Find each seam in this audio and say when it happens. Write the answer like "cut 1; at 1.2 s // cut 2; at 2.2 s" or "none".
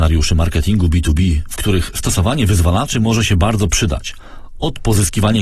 none